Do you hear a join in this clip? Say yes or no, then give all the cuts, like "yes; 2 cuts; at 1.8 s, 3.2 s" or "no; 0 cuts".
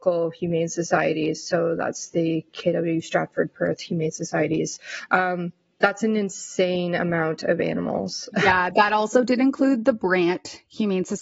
no; 0 cuts